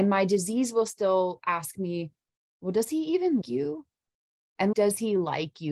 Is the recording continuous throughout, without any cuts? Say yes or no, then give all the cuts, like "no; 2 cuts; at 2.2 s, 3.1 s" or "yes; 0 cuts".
no; 2 cuts; at 3.4 s, 4.7 s